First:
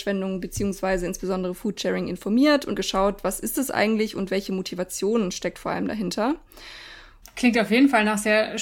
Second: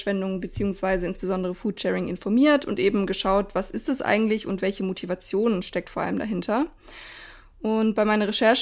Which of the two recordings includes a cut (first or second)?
first